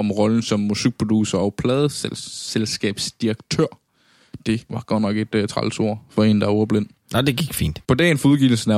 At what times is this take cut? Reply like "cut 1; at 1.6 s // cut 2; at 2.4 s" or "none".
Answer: cut 1; at 7.8 s